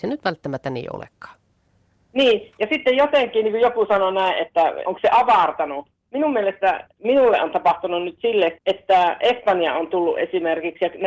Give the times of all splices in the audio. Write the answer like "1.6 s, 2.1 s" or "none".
4.8 s, 8.5 s